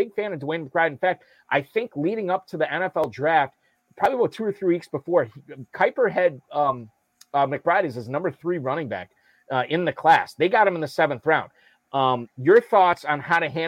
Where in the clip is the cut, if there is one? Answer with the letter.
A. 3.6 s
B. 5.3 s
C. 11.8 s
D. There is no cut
C